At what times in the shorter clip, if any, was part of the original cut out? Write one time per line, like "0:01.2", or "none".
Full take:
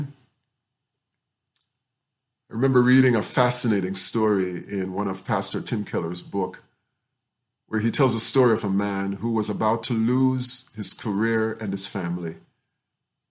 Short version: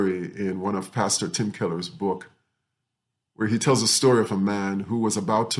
none